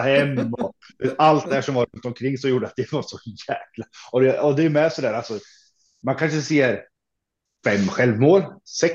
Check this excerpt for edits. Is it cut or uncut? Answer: cut